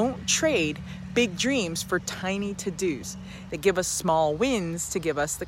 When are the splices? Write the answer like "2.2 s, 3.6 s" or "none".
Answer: 3.5 s